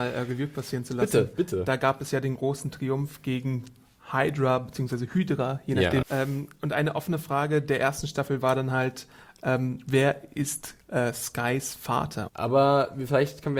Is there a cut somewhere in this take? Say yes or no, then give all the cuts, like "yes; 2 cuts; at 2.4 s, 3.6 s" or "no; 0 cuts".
yes; 2 cuts; at 6.0 s, 12.3 s